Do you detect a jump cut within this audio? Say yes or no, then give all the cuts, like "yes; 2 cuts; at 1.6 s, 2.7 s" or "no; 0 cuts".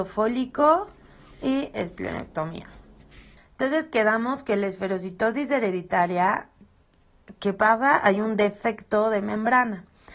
yes; 1 cut; at 3.4 s